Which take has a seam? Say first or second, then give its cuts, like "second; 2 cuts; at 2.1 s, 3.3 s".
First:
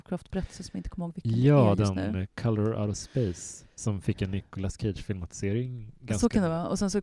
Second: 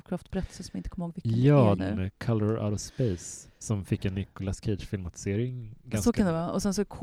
second; 1 cut; at 1.8 s